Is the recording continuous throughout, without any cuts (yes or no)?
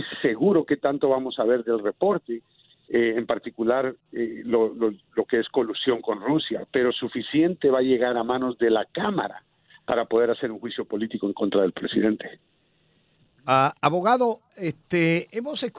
yes